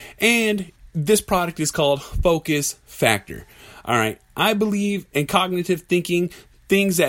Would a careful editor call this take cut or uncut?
uncut